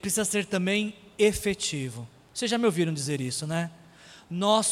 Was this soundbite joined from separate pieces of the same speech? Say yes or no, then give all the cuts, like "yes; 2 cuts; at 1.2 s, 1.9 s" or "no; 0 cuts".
no; 0 cuts